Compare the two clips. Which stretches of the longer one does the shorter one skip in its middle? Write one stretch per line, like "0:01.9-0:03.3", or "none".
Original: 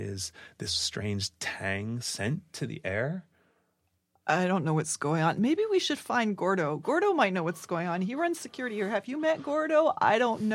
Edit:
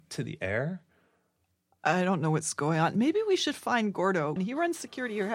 0:06.8-0:08.0